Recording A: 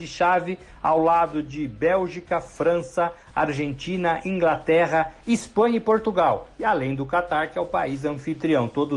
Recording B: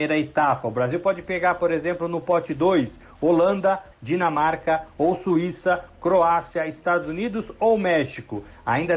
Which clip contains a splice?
B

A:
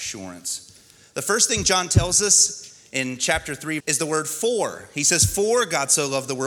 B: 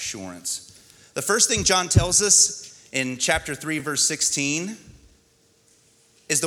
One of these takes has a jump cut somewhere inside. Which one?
A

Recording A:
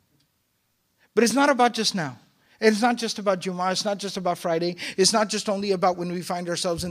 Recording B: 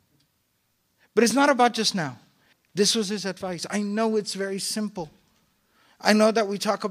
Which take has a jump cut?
B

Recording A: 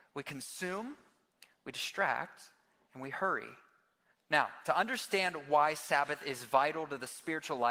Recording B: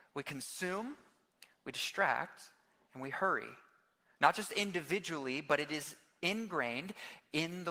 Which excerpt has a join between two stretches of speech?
A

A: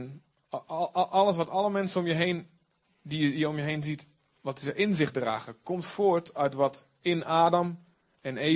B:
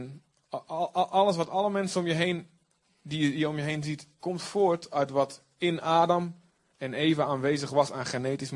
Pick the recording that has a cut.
B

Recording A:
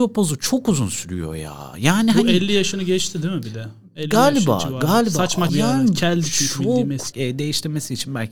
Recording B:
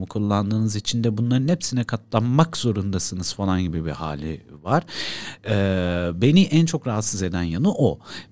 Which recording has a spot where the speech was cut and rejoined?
A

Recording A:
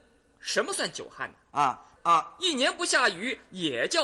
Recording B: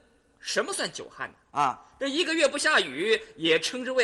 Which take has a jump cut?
A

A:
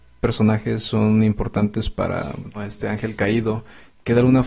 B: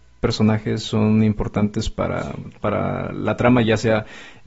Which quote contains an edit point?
A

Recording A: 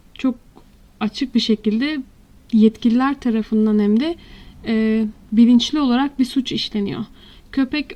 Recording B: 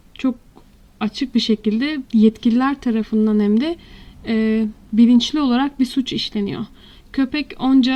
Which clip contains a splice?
B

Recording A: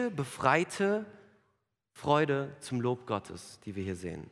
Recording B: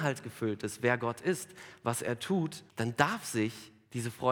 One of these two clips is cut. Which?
B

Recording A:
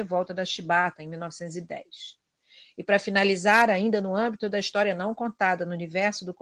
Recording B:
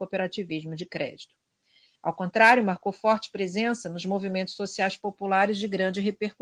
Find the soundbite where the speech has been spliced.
B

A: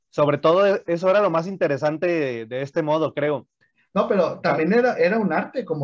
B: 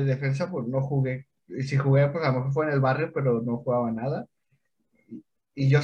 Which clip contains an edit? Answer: A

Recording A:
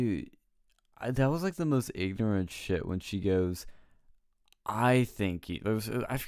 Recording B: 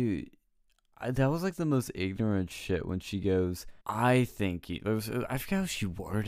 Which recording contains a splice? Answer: B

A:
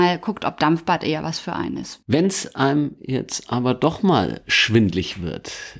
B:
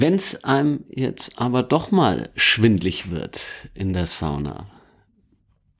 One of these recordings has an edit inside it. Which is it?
A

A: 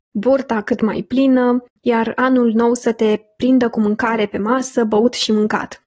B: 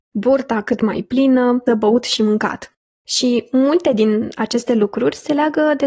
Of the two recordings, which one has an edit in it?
B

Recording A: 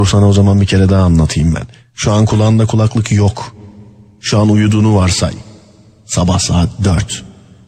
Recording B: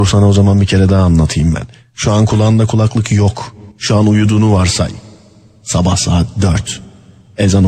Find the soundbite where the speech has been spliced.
B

